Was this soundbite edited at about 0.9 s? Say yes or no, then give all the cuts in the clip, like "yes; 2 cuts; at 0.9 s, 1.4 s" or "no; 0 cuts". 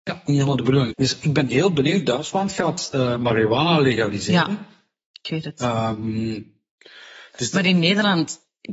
yes; 1 cut; at 0.9 s